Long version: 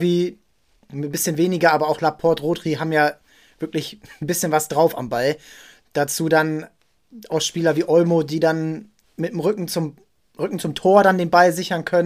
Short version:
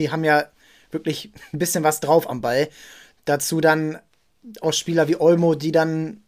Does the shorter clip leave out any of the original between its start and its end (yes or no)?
no